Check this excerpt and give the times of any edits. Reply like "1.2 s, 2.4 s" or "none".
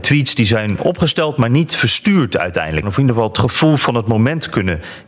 2.8 s